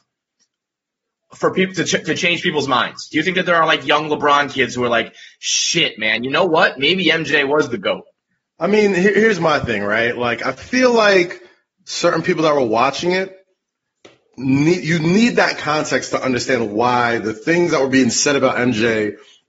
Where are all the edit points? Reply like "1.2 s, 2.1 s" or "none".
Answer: none